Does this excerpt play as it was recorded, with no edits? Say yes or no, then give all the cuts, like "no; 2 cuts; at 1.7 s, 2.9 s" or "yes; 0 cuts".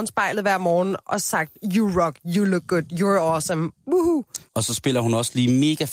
no; 1 cut; at 4.5 s